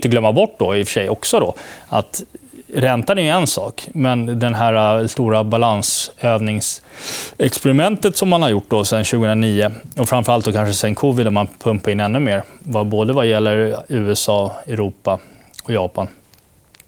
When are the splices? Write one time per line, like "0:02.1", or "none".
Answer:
none